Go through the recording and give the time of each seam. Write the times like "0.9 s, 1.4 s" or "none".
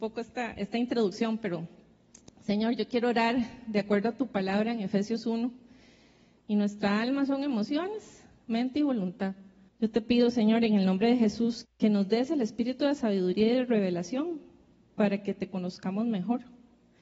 6.4 s, 9.7 s, 11.6 s